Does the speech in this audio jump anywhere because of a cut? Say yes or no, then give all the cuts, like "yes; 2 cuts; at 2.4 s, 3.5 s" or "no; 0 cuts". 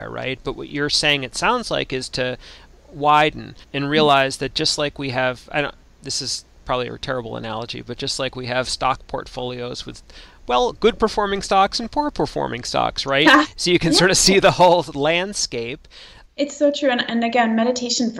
yes; 2 cuts; at 3.6 s, 16.2 s